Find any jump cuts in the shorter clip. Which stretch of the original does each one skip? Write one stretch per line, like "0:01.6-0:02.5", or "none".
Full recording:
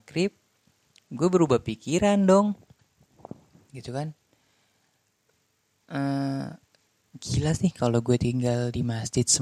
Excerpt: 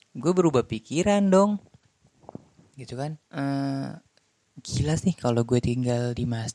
0:04.2-0:05.8